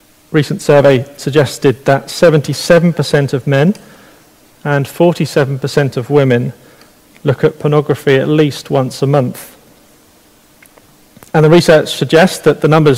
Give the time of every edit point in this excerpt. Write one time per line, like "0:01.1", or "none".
none